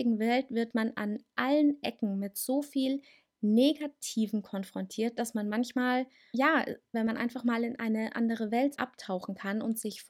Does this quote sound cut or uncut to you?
cut